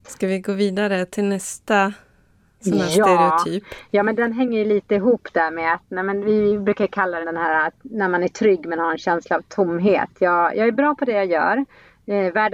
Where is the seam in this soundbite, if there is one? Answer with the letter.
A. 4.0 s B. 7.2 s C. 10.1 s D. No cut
B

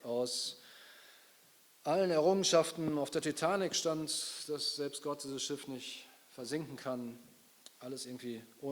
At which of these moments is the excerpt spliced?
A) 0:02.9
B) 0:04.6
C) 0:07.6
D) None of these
D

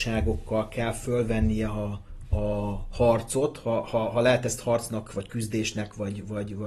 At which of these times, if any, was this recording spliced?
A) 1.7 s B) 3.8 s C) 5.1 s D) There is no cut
D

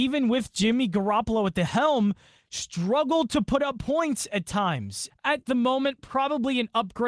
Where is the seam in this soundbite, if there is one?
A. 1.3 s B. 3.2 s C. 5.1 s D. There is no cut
C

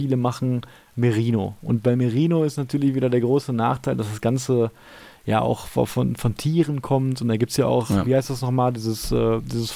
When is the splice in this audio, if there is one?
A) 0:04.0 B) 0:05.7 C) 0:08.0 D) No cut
D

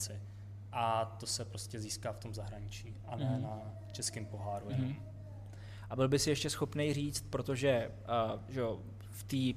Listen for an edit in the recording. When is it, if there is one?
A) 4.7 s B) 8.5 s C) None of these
C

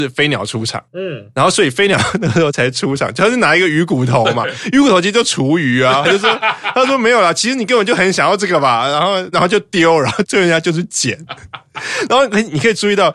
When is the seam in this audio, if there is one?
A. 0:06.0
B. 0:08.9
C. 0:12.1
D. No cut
D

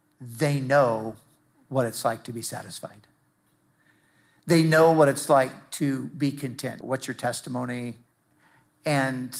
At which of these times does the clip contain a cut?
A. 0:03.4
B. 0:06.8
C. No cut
B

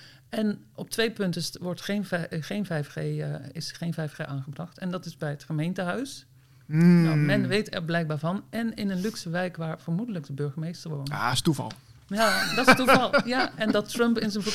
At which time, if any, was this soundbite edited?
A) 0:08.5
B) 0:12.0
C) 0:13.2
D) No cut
D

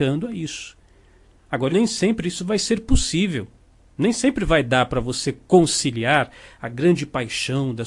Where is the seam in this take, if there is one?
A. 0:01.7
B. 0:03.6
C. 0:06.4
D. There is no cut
A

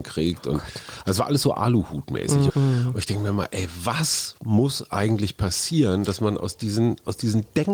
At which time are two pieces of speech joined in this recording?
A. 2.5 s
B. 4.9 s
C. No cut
A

